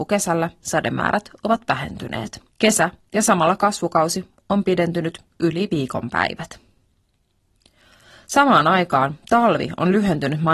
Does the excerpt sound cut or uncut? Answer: cut